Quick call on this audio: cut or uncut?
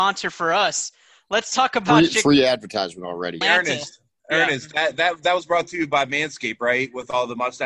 cut